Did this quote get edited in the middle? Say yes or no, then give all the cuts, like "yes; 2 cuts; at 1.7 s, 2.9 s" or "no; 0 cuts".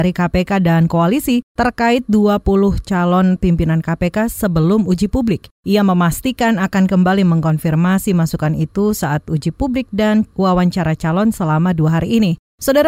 no; 0 cuts